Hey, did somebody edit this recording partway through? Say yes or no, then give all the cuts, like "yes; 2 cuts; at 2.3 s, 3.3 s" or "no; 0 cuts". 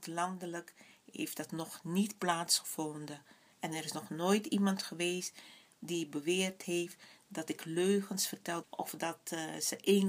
yes; 2 cuts; at 3.5 s, 8.6 s